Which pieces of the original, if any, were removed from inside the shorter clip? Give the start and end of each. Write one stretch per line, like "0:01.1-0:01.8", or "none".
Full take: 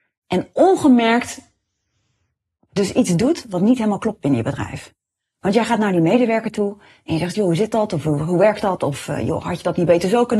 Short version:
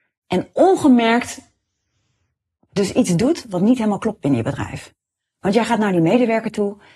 none